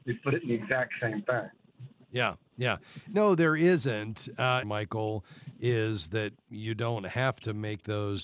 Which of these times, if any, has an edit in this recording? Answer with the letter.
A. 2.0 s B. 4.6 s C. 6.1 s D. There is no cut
B